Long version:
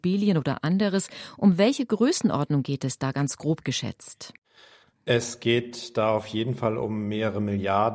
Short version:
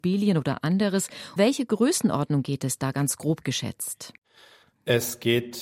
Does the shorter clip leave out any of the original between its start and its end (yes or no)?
yes